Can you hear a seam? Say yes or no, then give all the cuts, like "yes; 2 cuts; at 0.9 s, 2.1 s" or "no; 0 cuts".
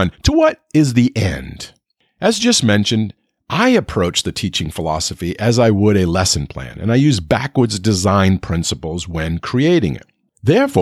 no; 0 cuts